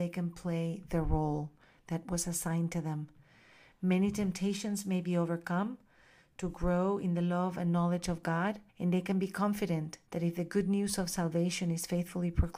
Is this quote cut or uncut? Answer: cut